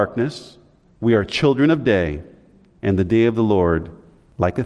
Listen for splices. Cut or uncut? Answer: uncut